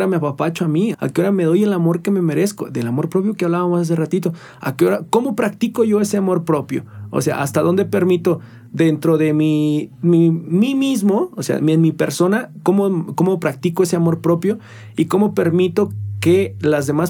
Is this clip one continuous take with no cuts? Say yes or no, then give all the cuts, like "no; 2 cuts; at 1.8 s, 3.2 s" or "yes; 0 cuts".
no; 1 cut; at 0.9 s